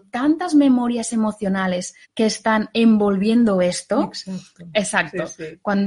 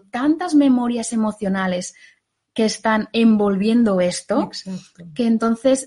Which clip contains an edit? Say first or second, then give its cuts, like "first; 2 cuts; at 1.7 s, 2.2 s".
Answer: first; 2 cuts; at 2.0 s, 4.7 s